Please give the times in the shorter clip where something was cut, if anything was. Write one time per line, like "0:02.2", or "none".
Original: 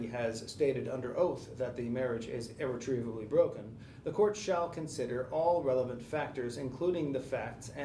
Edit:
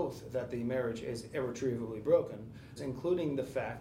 0:02.8